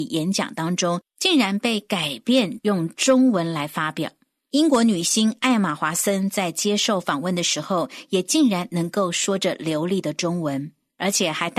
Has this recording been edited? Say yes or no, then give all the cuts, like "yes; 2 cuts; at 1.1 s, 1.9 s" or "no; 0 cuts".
no; 0 cuts